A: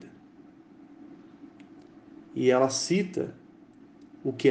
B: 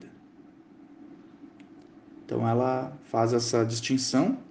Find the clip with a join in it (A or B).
B